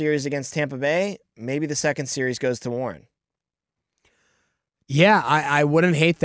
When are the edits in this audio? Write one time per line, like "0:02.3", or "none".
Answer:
none